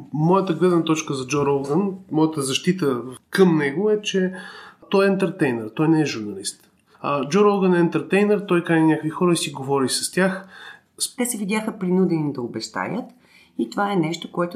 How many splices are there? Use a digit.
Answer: 2